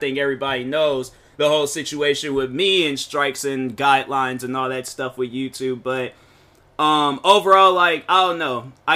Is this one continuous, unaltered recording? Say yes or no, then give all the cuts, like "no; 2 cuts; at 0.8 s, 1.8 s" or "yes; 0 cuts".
yes; 0 cuts